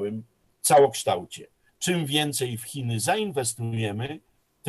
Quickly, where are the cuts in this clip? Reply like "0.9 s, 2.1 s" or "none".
1.7 s